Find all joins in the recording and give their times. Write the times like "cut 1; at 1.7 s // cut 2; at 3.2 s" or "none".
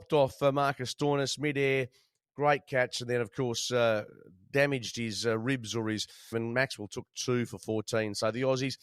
cut 1; at 6.3 s

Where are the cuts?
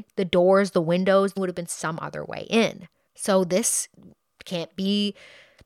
cut 1; at 1.4 s // cut 2; at 3.1 s

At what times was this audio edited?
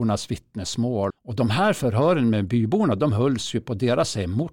cut 1; at 1.1 s

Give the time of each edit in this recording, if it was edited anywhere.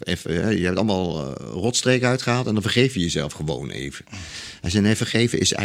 none

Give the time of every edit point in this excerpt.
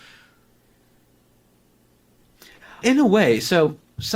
cut 1; at 2.8 s

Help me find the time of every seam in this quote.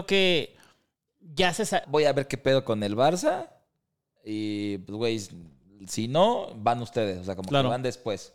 cut 1; at 1.8 s

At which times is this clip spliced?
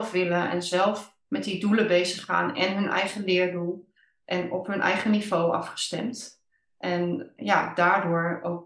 cut 1; at 1.2 s

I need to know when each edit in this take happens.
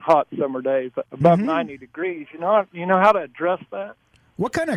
none

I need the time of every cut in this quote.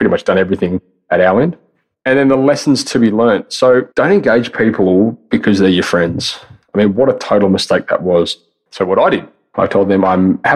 cut 1; at 3.9 s // cut 2; at 8.7 s

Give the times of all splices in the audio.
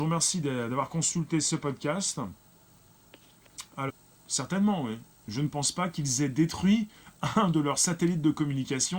none

